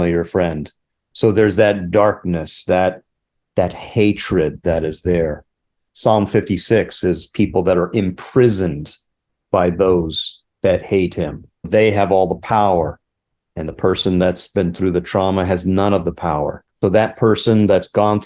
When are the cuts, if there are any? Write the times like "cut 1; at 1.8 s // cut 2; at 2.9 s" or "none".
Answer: cut 1; at 4.6 s // cut 2; at 11.6 s // cut 3; at 16.8 s